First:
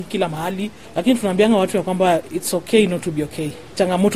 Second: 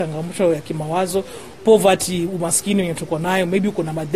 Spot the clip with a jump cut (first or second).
second